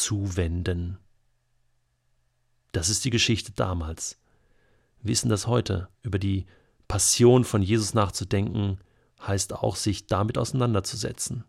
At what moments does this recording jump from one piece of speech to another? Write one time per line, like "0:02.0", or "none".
0:06.0